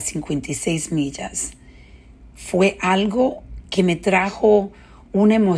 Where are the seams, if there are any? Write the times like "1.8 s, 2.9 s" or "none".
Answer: none

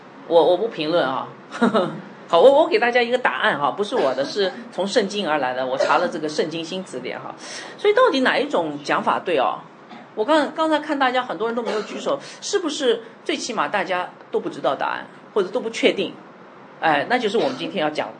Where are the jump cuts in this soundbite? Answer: none

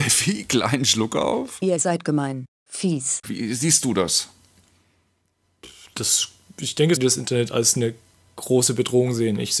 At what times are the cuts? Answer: 3.2 s, 7.0 s

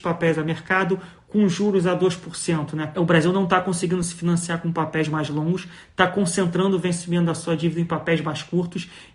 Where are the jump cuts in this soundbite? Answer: 2.9 s

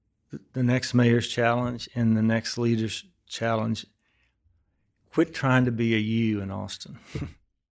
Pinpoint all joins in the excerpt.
none

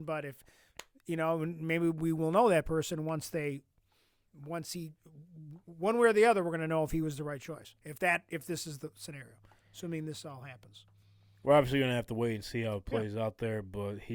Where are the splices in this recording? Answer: 4.3 s

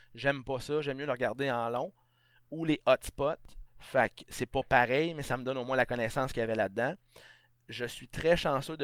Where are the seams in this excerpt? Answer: 3.7 s

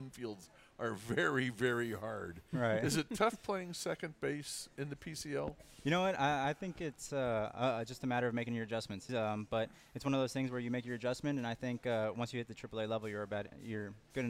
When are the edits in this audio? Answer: 9.1 s

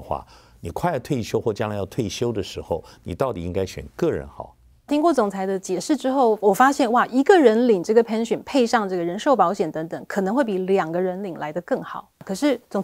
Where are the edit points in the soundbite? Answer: 4.9 s

